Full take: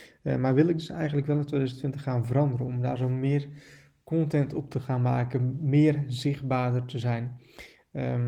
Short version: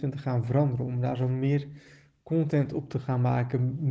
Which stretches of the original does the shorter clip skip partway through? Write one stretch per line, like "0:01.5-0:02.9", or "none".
none